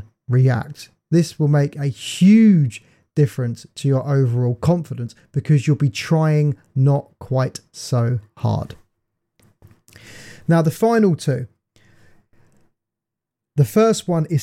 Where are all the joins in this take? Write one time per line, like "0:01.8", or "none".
none